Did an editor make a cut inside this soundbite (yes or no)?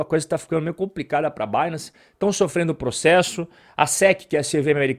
no